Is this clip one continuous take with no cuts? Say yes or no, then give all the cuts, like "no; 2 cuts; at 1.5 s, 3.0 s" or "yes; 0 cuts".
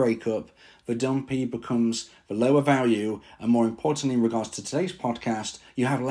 yes; 0 cuts